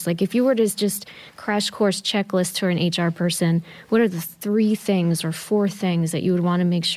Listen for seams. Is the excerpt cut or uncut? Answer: uncut